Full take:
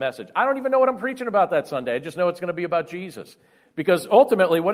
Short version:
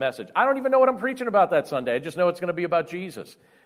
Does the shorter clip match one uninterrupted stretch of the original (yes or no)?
yes